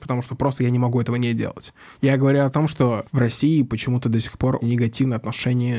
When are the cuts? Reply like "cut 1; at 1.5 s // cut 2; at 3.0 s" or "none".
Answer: cut 1; at 1.9 s // cut 2; at 3.1 s // cut 3; at 4.6 s